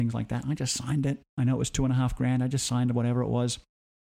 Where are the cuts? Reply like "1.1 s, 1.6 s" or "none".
none